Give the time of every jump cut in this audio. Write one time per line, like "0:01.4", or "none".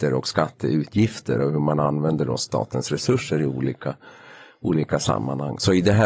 none